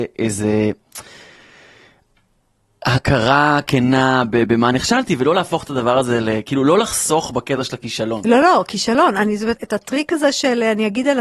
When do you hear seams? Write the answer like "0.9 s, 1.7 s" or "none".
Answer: 9.6 s